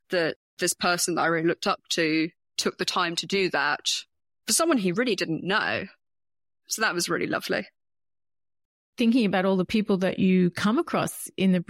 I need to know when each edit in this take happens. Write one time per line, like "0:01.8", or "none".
none